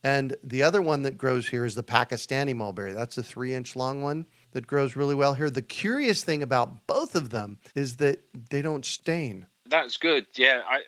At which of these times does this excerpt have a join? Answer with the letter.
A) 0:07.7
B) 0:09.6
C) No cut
A